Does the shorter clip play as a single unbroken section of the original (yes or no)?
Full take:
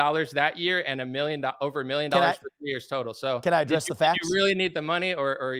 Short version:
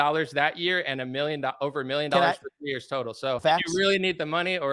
no